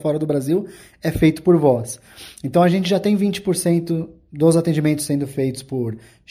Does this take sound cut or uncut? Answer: uncut